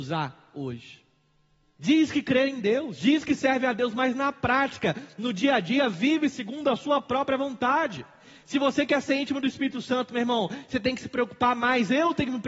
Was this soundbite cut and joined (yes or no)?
yes